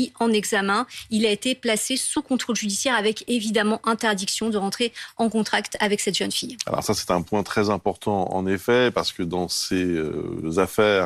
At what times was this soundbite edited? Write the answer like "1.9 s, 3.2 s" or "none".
none